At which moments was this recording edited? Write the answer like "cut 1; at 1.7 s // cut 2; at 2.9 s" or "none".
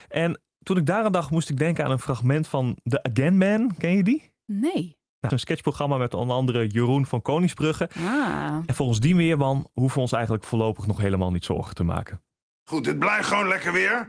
cut 1; at 5.3 s